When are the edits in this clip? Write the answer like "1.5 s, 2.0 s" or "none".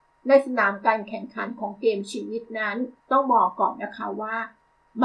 3.0 s